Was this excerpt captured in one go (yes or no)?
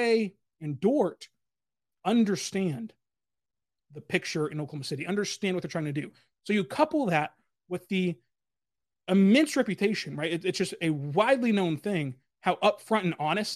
yes